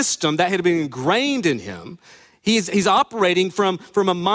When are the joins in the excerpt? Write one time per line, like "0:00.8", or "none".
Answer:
none